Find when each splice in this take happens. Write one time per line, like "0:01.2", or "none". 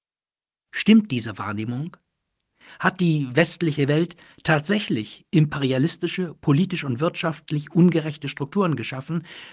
none